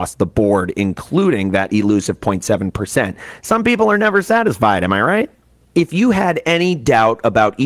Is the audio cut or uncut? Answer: uncut